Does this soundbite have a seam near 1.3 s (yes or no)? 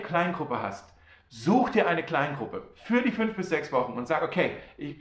no